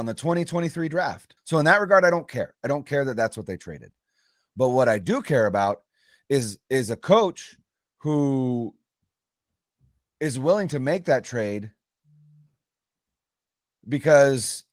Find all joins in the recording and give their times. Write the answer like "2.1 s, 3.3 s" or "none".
1.4 s